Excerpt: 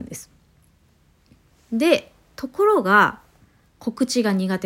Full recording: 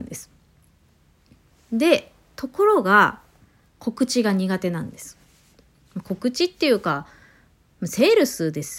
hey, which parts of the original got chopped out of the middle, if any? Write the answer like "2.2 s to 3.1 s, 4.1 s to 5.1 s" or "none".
none